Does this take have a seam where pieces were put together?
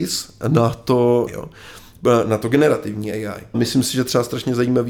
yes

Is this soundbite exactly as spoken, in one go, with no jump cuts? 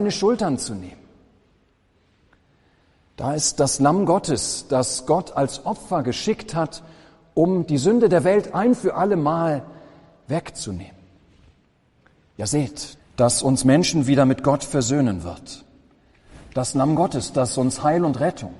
no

